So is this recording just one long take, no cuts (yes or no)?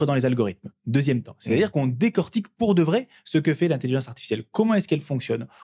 yes